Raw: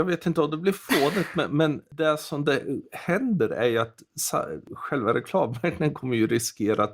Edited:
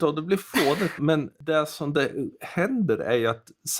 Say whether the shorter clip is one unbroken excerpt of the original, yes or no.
no